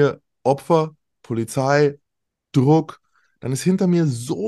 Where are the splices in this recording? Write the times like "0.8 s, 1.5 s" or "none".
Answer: none